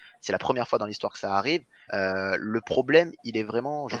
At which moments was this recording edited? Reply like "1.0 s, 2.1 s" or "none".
1.9 s